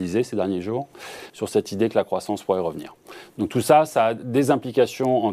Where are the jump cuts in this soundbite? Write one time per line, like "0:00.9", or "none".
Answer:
0:01.3